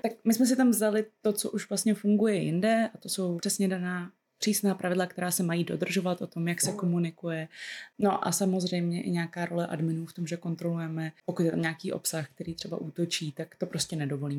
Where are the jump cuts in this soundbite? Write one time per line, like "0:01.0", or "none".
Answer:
0:03.4